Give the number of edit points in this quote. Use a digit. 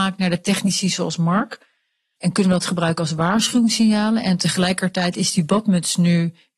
1